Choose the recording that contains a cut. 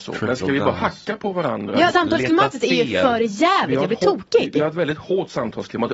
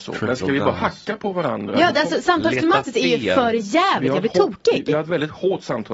first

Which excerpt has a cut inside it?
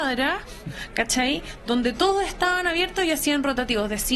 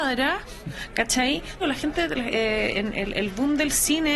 second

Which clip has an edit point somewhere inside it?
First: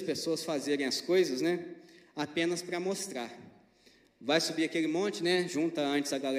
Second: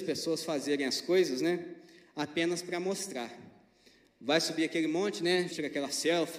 second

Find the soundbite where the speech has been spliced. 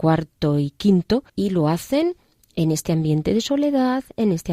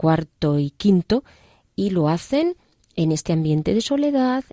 first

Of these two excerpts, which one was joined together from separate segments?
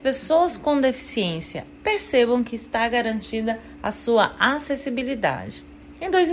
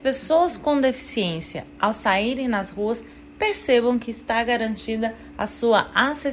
first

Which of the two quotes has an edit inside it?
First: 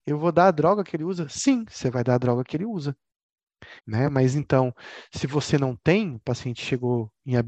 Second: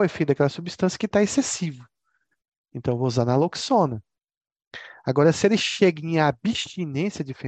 first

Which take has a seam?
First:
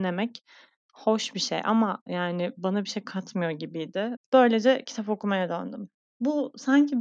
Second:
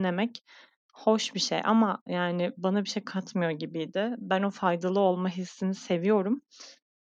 first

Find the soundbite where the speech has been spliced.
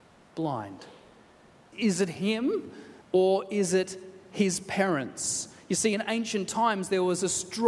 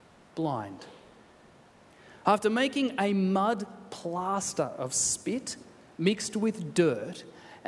first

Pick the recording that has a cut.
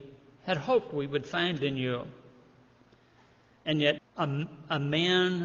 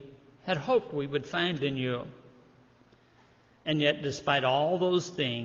first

